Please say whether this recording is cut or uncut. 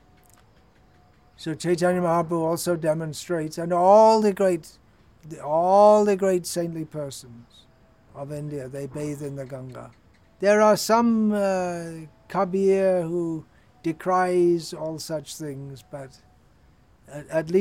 cut